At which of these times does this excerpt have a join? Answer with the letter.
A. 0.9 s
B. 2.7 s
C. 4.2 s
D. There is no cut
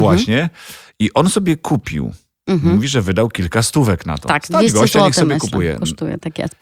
D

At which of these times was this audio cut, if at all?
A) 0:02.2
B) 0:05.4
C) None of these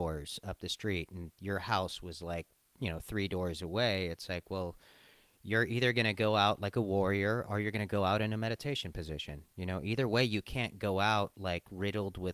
C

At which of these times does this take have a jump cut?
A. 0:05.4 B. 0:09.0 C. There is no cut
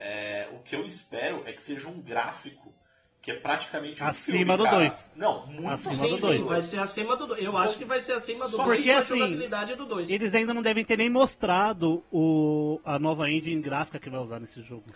C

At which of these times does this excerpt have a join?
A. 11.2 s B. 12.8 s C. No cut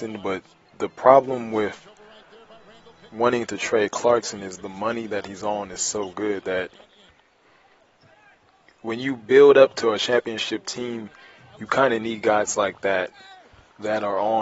C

